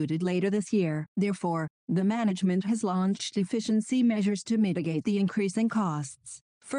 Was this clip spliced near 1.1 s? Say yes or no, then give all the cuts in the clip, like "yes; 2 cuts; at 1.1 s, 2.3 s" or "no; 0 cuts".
yes; 1 cut; at 1.1 s